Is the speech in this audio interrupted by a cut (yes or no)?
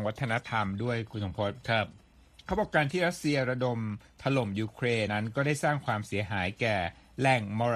yes